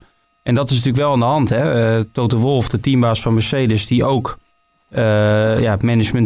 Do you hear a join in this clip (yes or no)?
no